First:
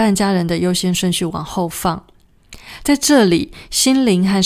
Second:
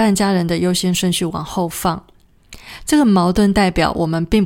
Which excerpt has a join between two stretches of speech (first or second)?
second